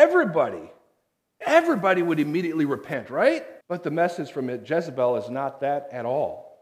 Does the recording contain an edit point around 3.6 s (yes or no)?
yes